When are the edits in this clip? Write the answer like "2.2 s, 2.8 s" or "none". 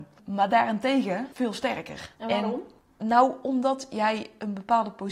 2.1 s